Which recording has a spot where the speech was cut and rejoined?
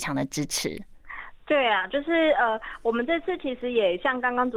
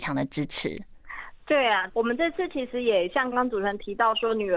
second; 2 cuts; at 1.9 s, 3.3 s

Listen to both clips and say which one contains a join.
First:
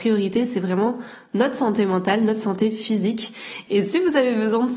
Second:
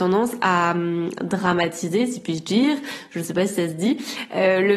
first; 1 cut; at 3.7 s

